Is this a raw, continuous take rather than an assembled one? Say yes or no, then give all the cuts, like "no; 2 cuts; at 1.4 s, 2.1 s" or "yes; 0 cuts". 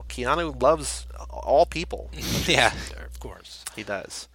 no; 1 cut; at 2.9 s